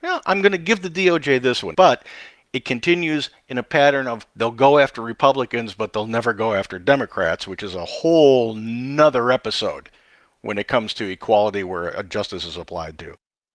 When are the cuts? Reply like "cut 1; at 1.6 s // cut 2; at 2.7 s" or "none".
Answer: cut 1; at 1.7 s